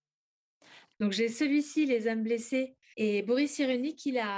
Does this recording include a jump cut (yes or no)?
yes